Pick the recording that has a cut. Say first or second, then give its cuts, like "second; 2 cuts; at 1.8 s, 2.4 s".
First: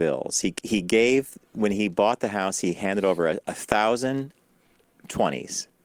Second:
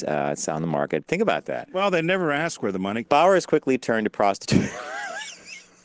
second; 2 cuts; at 1.1 s, 3.0 s